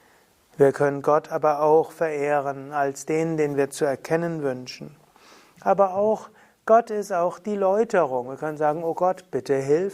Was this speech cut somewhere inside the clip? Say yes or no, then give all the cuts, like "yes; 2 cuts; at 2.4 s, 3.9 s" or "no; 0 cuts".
no; 0 cuts